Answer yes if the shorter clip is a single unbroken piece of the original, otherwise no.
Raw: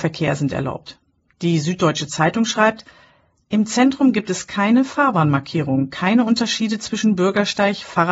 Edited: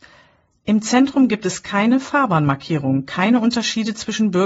yes